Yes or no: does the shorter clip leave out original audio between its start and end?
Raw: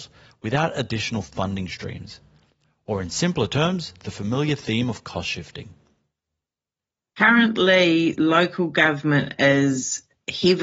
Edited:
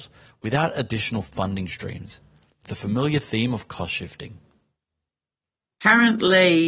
yes